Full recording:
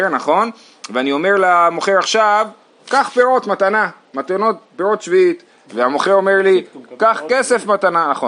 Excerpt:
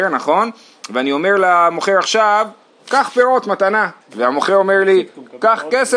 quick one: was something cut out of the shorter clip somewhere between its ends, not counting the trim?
yes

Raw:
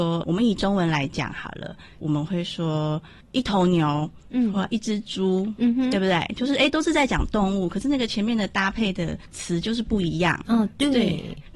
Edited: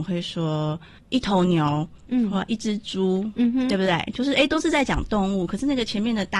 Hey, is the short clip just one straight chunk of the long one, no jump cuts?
yes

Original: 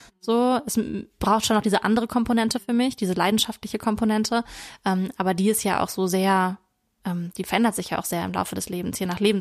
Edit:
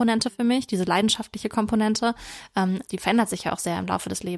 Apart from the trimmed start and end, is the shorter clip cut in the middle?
yes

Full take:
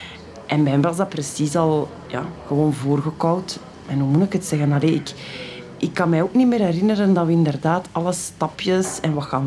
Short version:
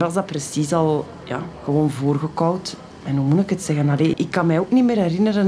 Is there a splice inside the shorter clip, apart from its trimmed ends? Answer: yes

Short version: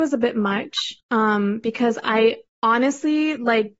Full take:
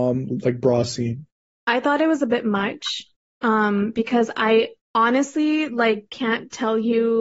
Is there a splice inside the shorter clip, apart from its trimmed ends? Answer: yes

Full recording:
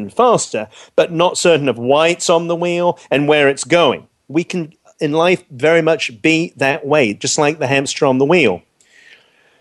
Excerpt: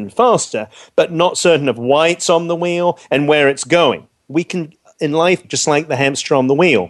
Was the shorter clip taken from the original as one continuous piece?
no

